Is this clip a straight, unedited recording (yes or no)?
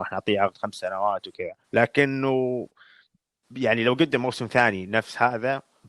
no